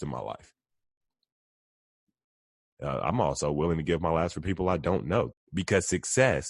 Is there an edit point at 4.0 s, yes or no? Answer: no